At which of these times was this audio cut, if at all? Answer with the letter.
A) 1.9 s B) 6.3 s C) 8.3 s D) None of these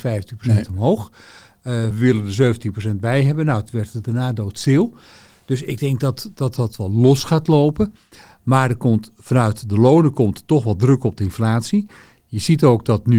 A